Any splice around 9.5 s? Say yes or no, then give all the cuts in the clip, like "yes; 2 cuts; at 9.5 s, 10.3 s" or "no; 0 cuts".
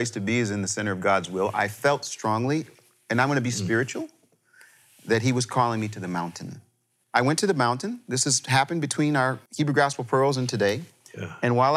yes; 2 cuts; at 7.0 s, 9.5 s